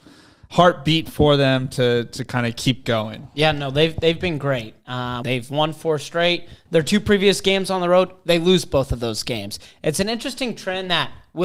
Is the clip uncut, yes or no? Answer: no